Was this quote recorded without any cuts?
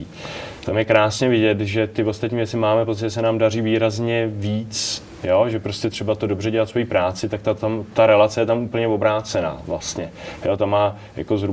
yes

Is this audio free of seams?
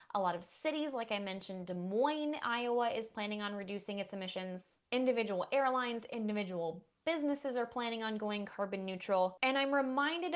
yes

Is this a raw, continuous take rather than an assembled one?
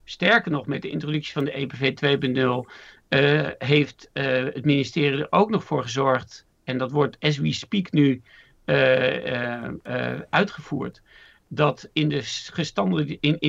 yes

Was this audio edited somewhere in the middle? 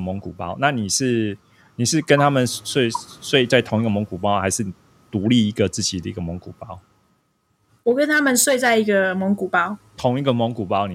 no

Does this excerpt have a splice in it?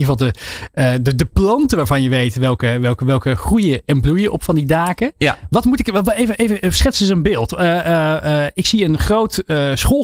no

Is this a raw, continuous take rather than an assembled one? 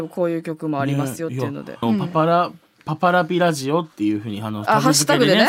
no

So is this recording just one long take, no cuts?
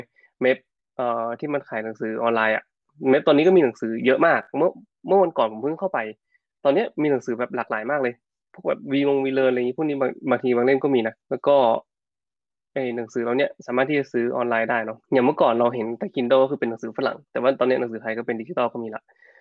no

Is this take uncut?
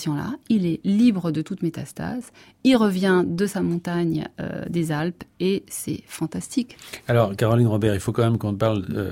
yes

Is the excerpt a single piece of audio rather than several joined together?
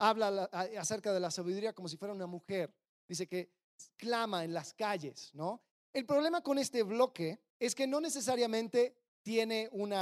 no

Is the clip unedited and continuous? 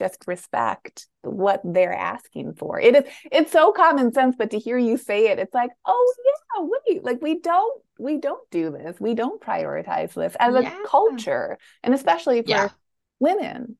yes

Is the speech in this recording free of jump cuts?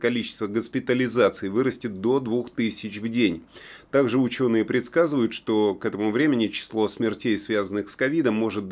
yes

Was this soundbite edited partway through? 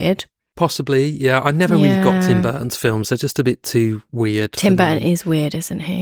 no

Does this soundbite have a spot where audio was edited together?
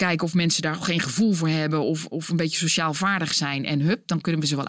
no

